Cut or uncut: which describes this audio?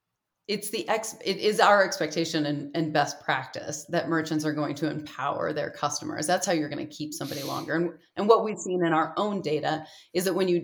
uncut